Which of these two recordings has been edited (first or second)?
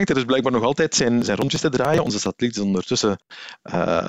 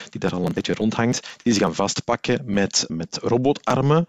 second